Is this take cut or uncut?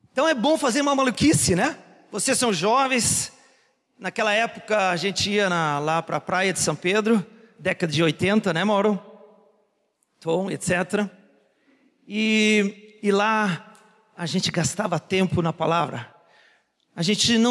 uncut